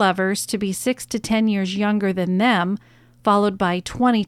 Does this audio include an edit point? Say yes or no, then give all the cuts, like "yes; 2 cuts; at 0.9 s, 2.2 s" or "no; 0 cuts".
yes; 1 cut; at 3.2 s